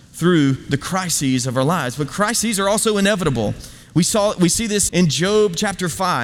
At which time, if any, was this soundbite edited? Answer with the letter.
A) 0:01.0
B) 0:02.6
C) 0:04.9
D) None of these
C